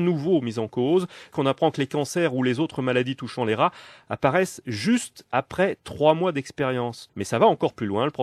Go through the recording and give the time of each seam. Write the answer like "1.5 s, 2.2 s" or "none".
1.3 s, 7.1 s